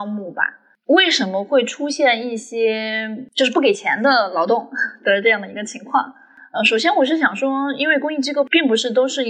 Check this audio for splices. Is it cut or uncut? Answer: uncut